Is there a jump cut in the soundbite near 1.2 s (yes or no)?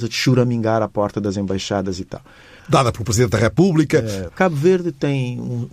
no